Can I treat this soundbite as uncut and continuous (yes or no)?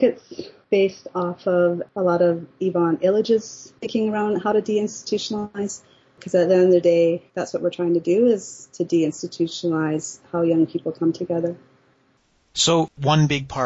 yes